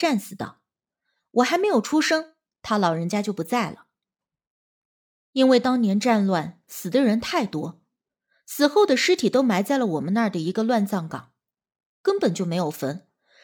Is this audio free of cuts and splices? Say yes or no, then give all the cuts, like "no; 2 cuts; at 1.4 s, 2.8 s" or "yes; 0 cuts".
yes; 0 cuts